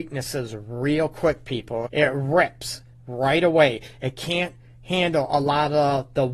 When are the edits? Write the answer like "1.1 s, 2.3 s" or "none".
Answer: 1.9 s

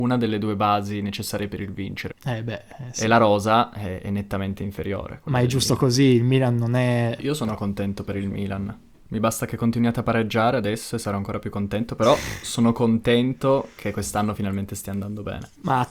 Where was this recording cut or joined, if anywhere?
2.1 s, 7.2 s

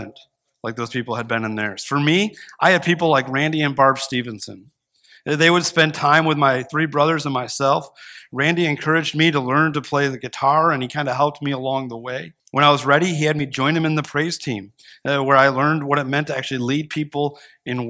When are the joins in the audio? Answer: 12.4 s

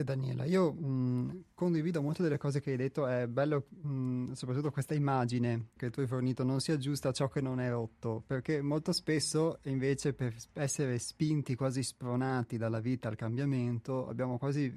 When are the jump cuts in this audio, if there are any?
5.8 s

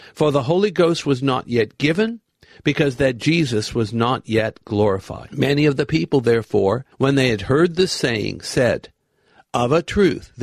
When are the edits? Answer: 6.9 s

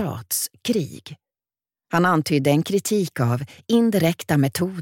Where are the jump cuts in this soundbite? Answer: none

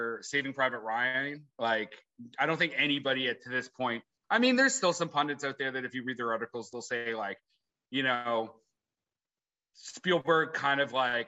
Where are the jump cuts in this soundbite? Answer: none

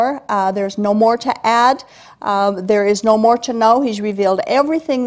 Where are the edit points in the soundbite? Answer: none

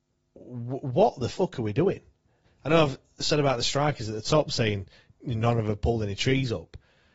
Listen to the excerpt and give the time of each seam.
2.4 s

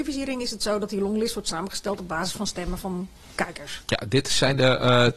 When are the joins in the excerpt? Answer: none

